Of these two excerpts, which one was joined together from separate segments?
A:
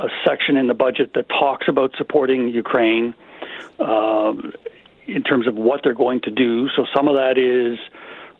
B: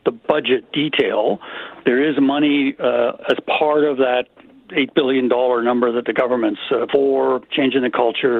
B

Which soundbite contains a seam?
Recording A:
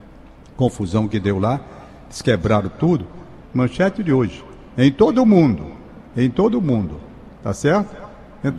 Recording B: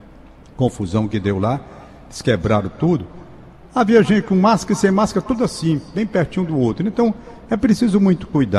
A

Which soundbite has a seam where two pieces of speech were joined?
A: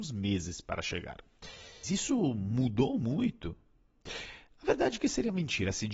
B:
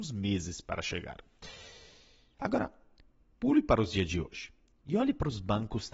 A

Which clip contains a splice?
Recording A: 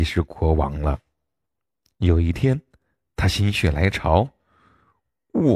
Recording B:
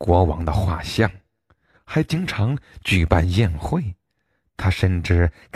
B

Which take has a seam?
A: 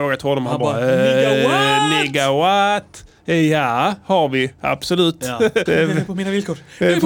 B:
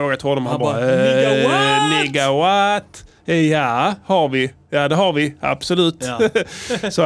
A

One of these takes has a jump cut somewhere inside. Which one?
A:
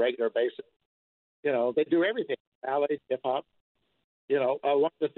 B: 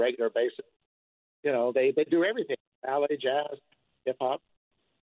A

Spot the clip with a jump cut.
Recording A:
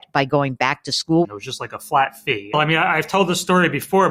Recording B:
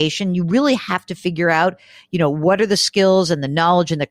A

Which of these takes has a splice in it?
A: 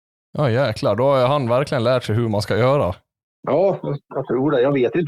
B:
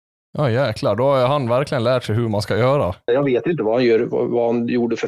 B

